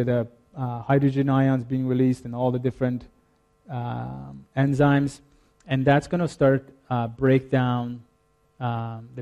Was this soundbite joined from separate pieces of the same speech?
no; 0 cuts

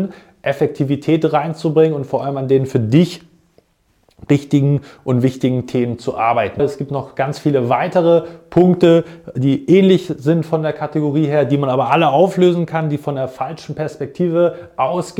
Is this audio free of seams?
no; 1 cut; at 6.6 s

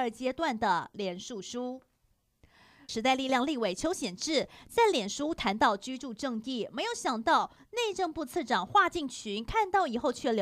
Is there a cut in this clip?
yes; 1 cut; at 2.9 s

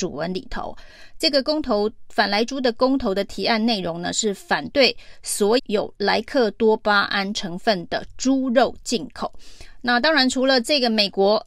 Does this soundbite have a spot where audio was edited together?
yes; 1 cut; at 5.6 s

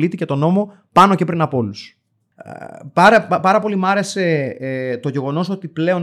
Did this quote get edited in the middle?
yes; 1 cut; at 2.2 s

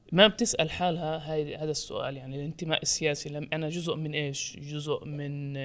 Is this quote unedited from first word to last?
yes; 0 cuts

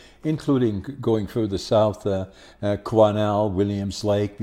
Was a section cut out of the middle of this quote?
no; 0 cuts

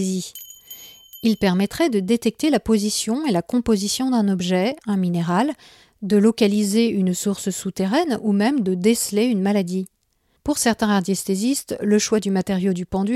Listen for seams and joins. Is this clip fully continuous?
no; 1 cut; at 10.4 s

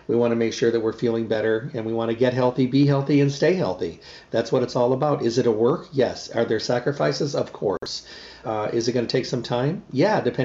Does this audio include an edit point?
yes; 1 cut; at 8.4 s

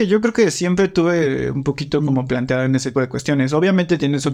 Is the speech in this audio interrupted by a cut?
yes; 1 cut; at 2.9 s

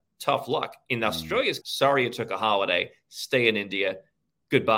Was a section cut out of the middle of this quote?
yes; 1 cut; at 1.6 s

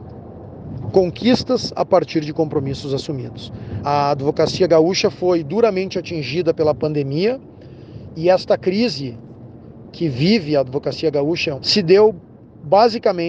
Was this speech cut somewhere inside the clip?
yes; 2 cuts; at 3.8 s, 11.6 s

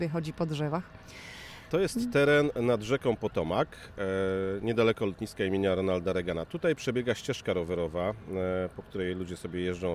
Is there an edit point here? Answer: yes; 1 cut; at 1.7 s

